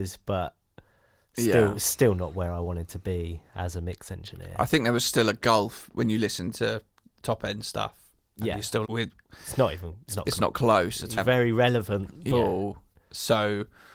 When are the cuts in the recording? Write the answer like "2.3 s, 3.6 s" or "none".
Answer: 8.8 s, 11.2 s, 12.3 s